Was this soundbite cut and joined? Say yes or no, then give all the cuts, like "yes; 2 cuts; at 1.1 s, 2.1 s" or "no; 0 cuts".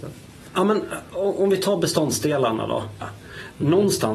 yes; 1 cut; at 3.0 s